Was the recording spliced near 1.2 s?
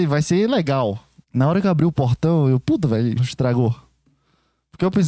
yes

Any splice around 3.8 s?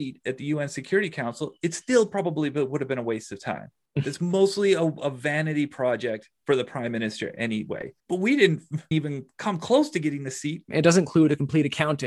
no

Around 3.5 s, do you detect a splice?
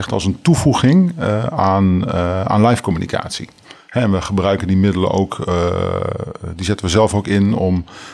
no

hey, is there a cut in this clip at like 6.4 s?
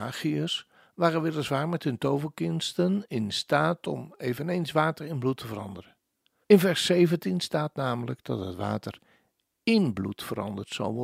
yes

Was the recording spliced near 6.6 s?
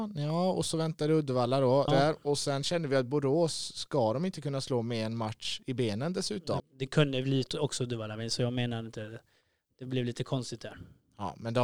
yes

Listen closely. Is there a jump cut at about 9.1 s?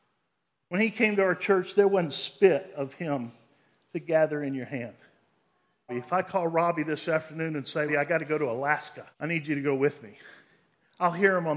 yes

